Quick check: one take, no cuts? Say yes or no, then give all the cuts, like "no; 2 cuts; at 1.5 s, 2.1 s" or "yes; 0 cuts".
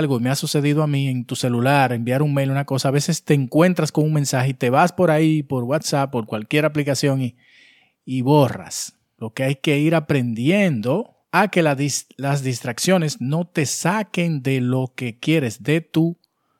no; 2 cuts; at 9.2 s, 11.2 s